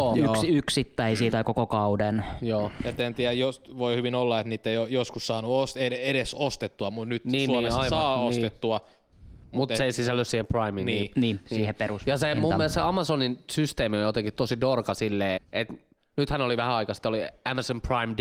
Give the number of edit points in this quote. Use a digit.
1